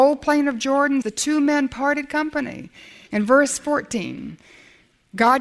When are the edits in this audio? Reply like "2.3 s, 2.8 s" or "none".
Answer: 1.0 s, 3.1 s